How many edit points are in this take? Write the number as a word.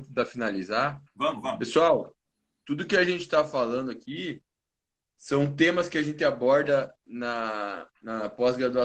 zero